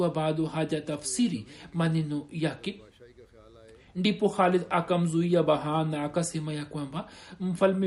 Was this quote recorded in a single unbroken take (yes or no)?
yes